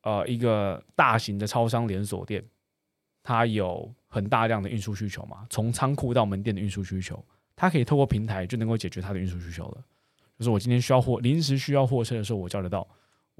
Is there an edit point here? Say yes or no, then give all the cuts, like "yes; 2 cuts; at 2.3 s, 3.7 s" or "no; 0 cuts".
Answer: no; 0 cuts